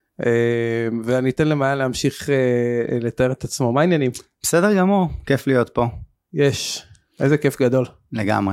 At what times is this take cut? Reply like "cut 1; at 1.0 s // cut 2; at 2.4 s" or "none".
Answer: none